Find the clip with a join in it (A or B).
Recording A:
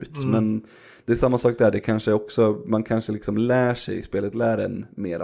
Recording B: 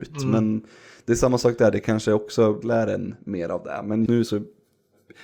B